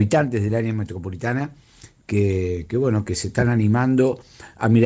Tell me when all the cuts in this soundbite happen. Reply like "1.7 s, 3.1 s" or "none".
none